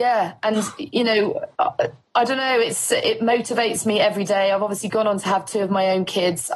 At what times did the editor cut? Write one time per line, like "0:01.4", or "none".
0:01.5